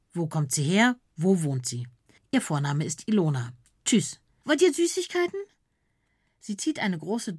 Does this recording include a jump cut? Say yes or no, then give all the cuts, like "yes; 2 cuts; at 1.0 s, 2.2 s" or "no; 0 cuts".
yes; 2 cuts; at 2.2 s, 4.4 s